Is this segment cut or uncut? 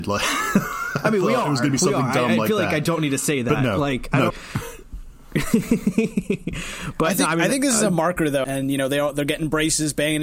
cut